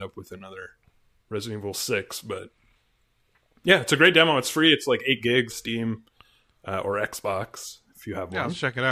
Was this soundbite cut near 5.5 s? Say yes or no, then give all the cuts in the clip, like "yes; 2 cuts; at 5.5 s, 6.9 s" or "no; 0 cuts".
yes; 1 cut; at 5.5 s